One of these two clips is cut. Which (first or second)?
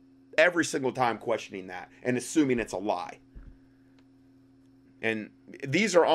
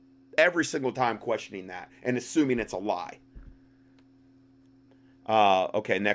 first